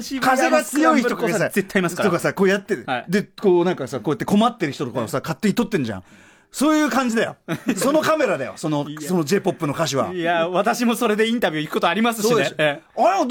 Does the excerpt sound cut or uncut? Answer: uncut